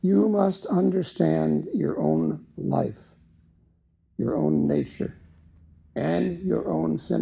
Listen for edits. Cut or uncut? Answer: uncut